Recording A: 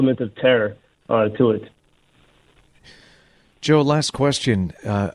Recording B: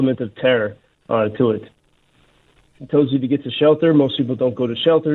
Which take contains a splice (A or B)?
B